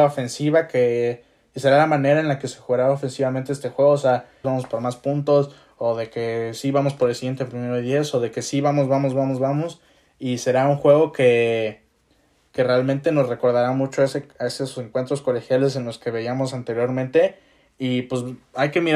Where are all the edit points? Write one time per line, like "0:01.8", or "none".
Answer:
0:04.4